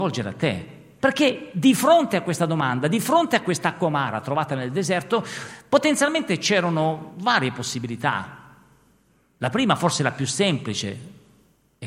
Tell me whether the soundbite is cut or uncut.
cut